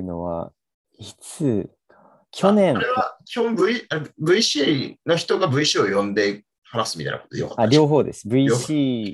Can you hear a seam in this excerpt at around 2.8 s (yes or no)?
no